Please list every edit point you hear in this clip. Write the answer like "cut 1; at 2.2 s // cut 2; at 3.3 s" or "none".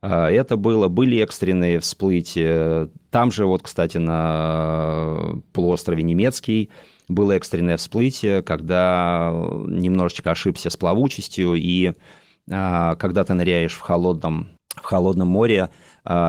cut 1; at 14.6 s